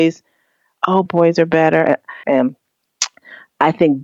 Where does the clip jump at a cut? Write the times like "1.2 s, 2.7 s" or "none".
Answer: 1.1 s, 2.2 s